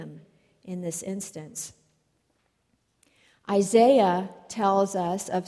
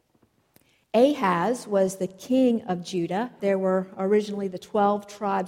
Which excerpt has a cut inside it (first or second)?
second